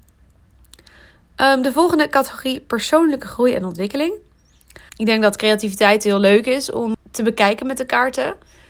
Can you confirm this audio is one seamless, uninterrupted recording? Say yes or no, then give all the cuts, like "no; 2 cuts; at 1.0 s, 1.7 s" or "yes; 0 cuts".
no; 2 cuts; at 4.9 s, 6.9 s